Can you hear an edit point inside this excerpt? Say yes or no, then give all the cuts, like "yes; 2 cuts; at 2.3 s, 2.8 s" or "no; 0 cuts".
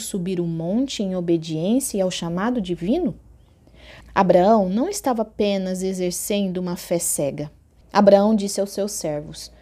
yes; 2 cuts; at 4.0 s, 7.8 s